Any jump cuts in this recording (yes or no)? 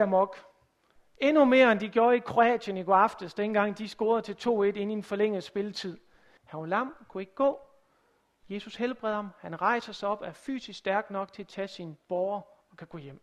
yes